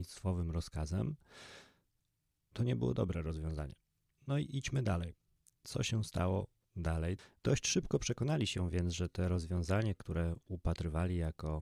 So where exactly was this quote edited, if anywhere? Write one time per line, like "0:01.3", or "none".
0:07.4

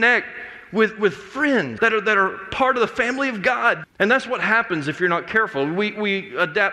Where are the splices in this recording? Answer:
0:01.8
0:03.8

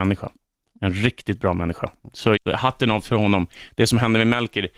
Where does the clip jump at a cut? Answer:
0:02.4

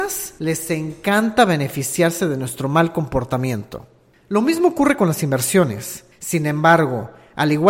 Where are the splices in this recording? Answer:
0:06.1

